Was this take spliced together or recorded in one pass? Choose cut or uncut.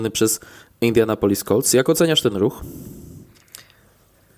uncut